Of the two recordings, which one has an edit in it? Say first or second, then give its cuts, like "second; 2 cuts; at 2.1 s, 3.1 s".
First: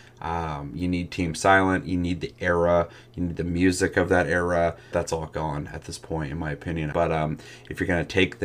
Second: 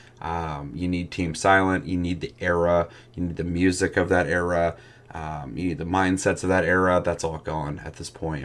first; 2 cuts; at 4.9 s, 6.9 s